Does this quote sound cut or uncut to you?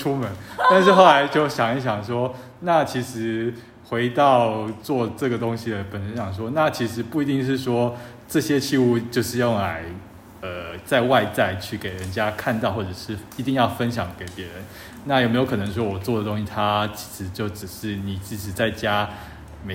uncut